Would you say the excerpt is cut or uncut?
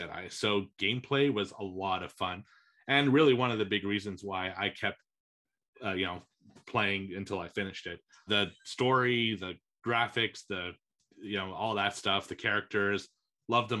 cut